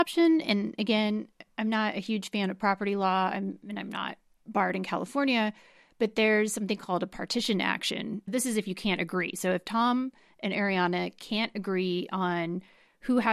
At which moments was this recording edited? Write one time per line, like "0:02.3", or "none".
none